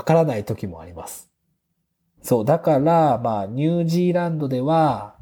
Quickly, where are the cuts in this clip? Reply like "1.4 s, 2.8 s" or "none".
2.2 s